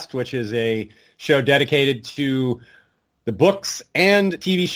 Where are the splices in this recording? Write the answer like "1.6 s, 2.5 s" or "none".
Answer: none